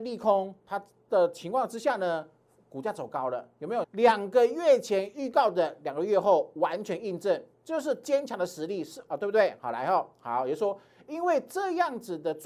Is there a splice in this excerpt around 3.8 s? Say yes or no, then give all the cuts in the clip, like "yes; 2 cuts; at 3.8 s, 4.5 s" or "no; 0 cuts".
yes; 1 cut; at 3.8 s